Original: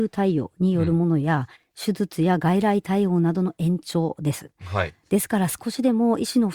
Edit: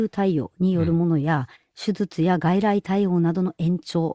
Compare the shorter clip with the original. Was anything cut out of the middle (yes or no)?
no